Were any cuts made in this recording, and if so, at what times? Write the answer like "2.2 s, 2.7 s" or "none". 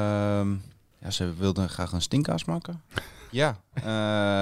0.9 s, 3.3 s